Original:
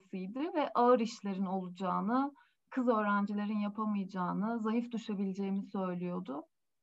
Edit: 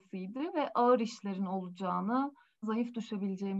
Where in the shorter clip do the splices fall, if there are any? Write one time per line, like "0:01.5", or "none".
0:02.6